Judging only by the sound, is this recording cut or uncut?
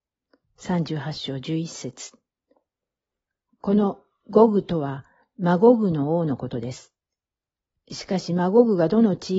uncut